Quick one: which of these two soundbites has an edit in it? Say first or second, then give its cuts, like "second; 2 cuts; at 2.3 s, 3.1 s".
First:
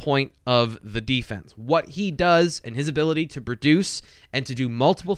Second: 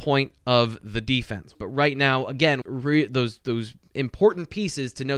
second; 2 cuts; at 1.5 s, 2.6 s